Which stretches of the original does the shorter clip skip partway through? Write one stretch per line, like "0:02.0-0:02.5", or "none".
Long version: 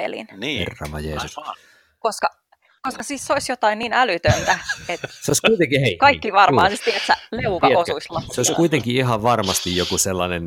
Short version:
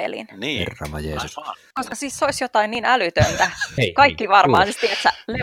0:01.7-0:02.8
0:04.9-0:05.8